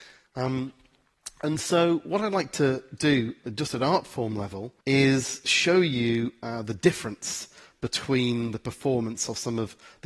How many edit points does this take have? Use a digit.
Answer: 1